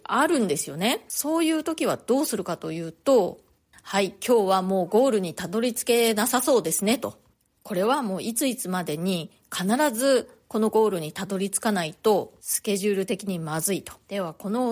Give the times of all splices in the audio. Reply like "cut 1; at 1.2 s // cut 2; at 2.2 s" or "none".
cut 1; at 3.7 s